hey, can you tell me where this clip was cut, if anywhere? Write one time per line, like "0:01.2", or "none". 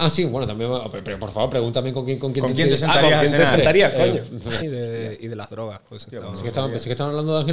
0:04.6